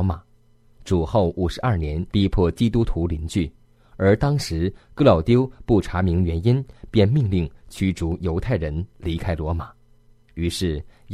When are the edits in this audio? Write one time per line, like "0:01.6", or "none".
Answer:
0:02.1